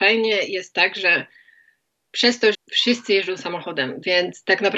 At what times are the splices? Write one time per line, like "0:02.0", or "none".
0:02.5